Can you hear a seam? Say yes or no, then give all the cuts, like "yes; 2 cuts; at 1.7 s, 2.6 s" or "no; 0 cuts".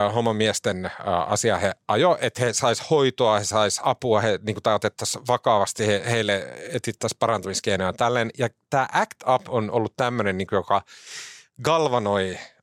no; 0 cuts